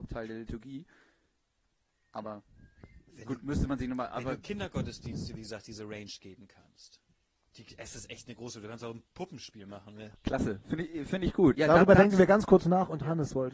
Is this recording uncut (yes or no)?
no